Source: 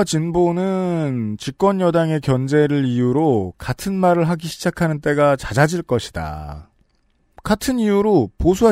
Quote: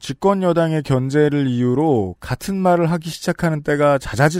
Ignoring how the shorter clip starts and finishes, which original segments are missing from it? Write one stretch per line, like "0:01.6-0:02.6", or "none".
none

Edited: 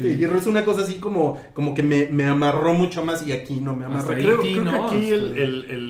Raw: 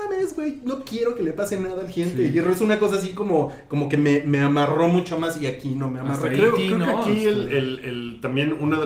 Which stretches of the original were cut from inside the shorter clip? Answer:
none

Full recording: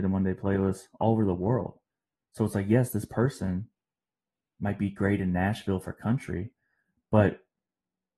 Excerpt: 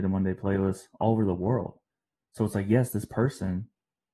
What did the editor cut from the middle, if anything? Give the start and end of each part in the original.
none

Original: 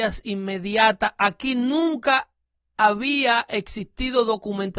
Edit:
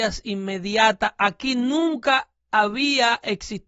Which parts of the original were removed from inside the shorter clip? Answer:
0:02.4-0:02.6

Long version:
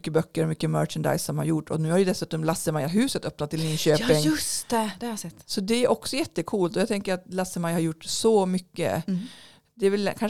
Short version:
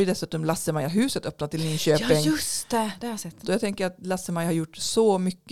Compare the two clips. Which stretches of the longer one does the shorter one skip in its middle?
0:05.4-0:06.7

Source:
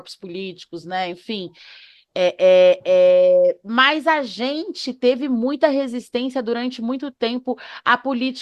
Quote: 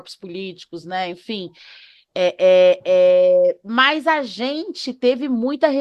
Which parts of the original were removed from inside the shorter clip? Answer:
none

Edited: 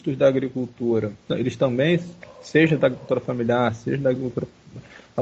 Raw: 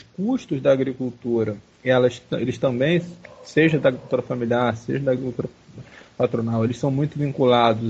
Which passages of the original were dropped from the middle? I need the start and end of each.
0:01.7-0:02.3

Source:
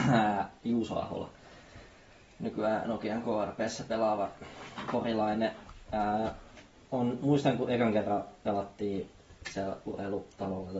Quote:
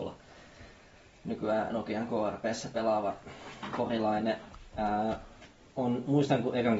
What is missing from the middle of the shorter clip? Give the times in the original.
none

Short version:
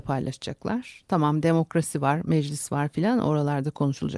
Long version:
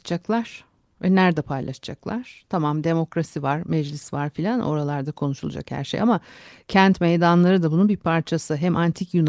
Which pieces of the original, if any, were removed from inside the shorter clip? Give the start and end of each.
none

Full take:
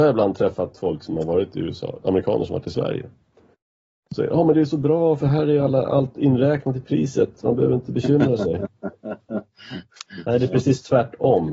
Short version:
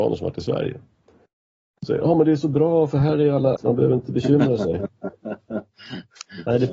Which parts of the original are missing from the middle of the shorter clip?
0:05.9-0:07.4

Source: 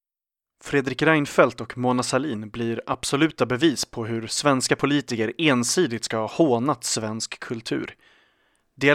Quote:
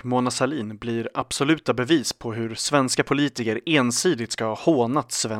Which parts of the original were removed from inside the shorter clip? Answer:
none

